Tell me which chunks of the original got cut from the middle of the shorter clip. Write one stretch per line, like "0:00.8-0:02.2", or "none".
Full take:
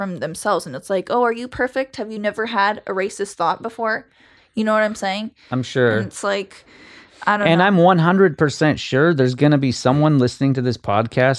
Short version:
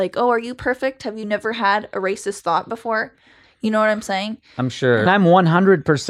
0:06.0-0:07.6